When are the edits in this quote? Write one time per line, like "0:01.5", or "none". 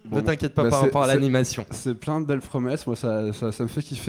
none